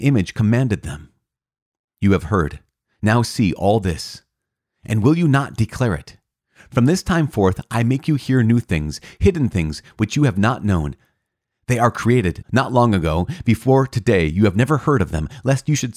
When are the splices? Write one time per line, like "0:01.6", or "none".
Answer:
0:12.4